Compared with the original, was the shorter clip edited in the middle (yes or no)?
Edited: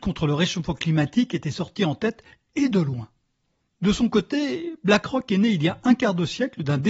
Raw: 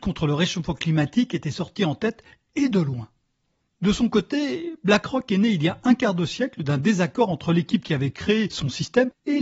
no